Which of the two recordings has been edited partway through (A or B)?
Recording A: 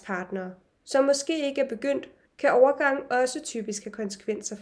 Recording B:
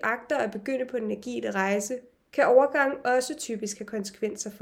A